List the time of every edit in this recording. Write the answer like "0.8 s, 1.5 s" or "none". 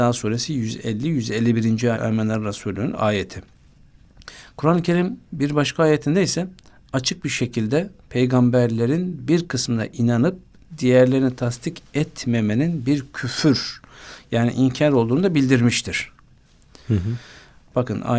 1.9 s